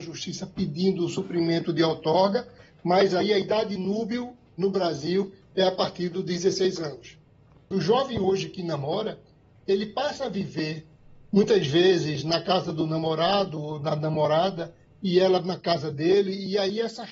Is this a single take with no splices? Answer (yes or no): no